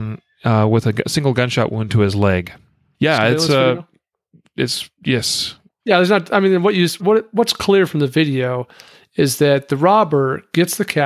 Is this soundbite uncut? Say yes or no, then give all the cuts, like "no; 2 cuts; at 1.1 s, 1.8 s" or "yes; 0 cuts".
no; 3 cuts; at 2.9 s, 5.7 s, 7.0 s